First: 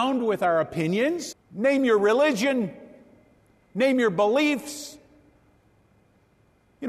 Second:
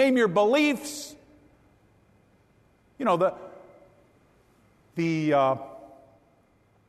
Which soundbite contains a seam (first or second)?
first